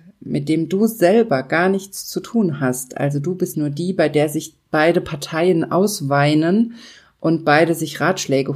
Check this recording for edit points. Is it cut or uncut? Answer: cut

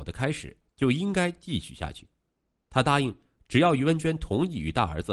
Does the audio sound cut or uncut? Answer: uncut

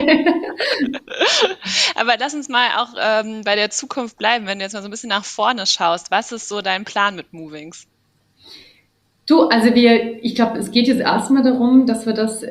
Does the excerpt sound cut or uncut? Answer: uncut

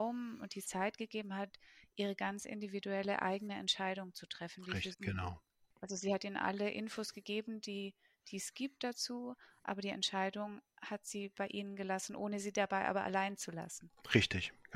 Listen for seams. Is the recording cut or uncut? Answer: cut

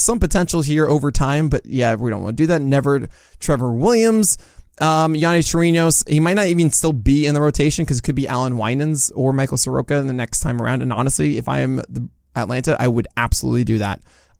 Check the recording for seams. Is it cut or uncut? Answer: uncut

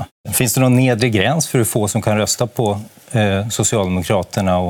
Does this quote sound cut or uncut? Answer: uncut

